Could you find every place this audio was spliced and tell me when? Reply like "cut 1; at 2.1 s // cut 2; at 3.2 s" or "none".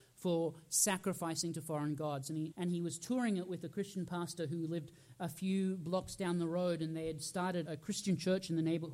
cut 1; at 2.5 s // cut 2; at 7.7 s